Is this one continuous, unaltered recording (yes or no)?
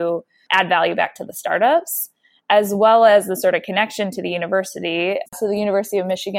no